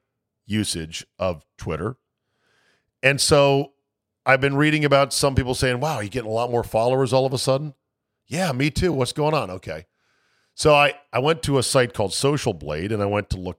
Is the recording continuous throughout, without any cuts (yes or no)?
yes